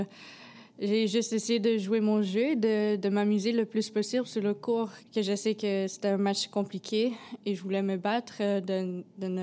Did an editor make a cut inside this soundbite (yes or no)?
no